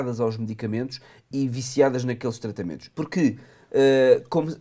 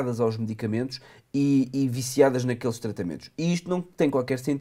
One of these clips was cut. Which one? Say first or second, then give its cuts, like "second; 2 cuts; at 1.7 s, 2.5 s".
first; 2 cuts; at 1.3 s, 2.9 s